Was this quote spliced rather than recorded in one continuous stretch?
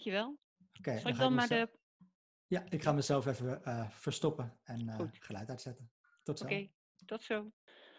no; 0 cuts

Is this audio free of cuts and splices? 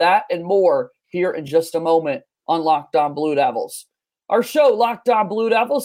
yes; 0 cuts

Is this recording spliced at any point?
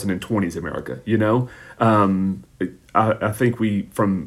no; 0 cuts

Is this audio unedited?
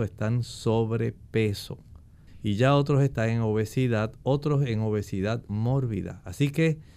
yes; 0 cuts

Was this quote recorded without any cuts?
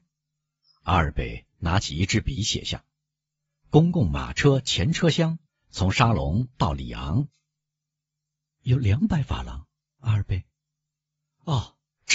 no; 3 cuts; at 5.5 s, 7.3 s, 10.0 s

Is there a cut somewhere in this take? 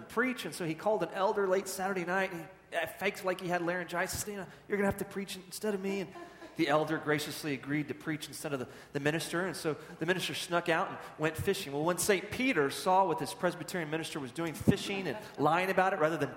yes; 1 cut; at 4.2 s

